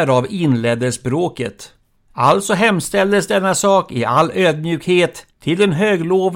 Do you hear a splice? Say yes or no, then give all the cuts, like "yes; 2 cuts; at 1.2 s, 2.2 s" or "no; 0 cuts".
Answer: no; 0 cuts